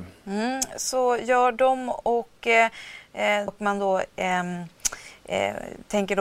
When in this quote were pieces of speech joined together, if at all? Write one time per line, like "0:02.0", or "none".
0:03.5